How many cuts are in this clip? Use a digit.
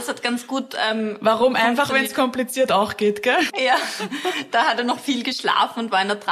1